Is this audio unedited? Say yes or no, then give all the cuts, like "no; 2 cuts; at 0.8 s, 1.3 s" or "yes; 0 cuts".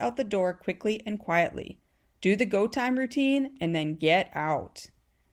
yes; 0 cuts